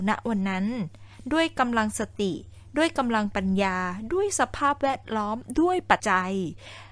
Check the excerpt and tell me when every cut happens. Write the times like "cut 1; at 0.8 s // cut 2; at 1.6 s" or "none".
cut 1; at 6.0 s